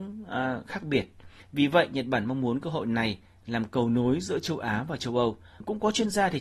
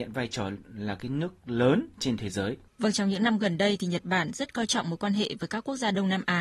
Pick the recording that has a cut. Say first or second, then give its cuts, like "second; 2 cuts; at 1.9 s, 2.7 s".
second; 1 cut; at 2.7 s